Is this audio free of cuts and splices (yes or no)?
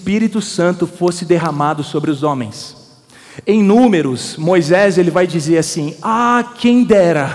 yes